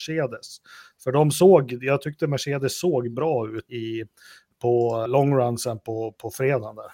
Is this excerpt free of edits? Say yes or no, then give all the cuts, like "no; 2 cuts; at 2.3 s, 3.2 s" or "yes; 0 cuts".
no; 2 cuts; at 3.7 s, 5.1 s